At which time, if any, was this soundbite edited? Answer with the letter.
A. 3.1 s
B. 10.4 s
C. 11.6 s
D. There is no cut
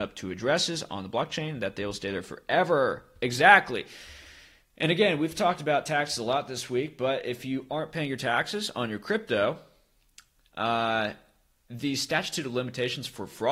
D